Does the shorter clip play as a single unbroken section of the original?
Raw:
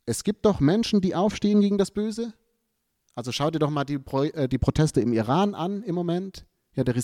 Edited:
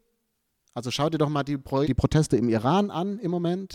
no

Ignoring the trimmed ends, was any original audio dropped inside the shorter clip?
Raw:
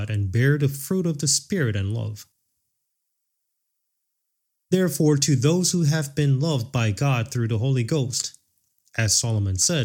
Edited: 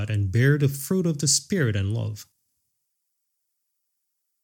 no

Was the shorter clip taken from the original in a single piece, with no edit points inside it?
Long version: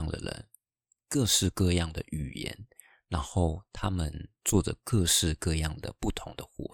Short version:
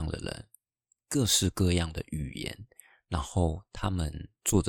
yes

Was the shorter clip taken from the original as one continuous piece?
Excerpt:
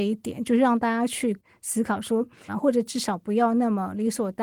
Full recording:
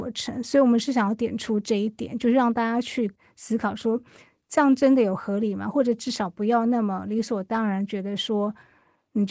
no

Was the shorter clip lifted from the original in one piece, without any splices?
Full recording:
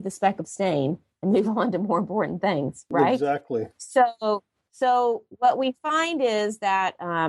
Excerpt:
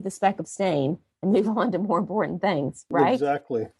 yes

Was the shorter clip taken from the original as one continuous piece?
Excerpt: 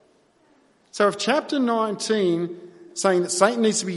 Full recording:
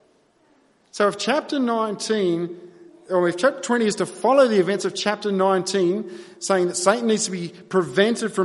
no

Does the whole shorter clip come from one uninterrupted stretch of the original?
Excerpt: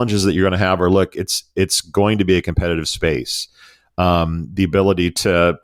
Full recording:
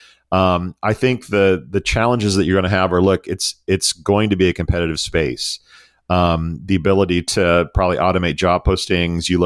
yes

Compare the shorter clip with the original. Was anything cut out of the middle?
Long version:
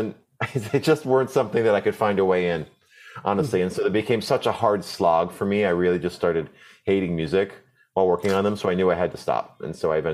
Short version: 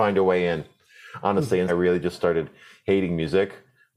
yes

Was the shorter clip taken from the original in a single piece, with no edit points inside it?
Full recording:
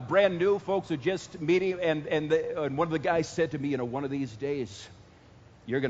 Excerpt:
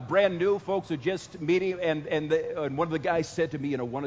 yes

